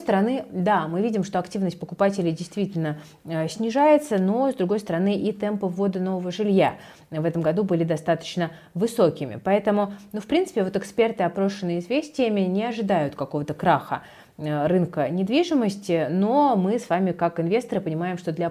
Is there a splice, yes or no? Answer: no